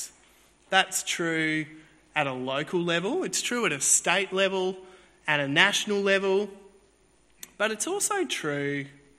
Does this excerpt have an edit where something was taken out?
no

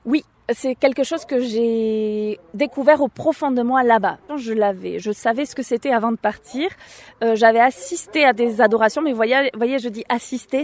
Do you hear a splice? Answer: yes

